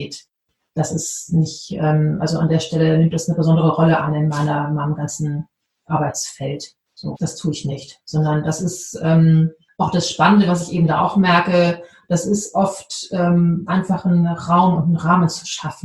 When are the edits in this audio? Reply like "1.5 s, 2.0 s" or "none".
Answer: 7.1 s, 13.7 s